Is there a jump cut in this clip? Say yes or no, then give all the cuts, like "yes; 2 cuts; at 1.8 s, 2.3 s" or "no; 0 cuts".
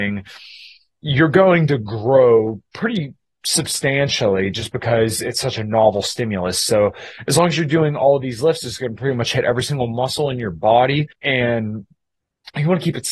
yes; 1 cut; at 11.1 s